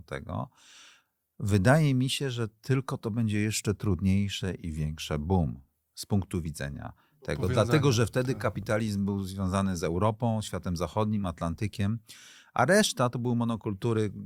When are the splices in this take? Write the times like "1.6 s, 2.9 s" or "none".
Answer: none